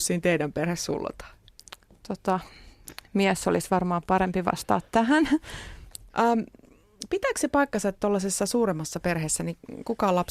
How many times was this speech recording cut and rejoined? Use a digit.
1